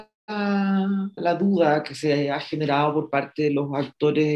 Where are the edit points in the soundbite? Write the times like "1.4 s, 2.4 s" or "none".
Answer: 1.2 s